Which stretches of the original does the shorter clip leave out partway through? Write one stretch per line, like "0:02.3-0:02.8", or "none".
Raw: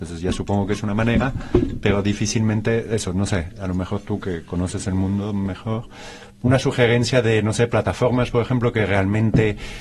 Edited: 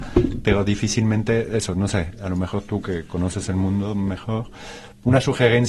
none